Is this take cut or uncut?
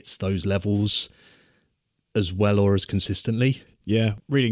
uncut